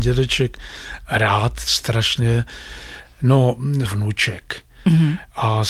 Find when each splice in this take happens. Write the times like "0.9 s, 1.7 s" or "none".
3.8 s